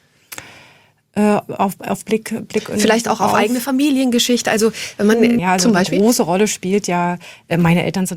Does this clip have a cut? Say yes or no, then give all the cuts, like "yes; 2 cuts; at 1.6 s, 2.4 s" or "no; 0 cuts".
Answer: yes; 1 cut; at 5.4 s